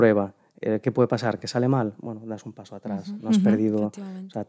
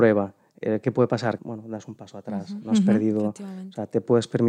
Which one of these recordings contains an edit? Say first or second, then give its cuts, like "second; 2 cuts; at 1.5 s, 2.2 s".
second; 1 cut; at 1.4 s